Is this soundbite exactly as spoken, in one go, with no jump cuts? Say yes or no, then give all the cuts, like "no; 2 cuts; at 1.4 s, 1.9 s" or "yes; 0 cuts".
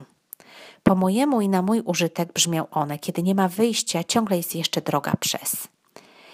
yes; 0 cuts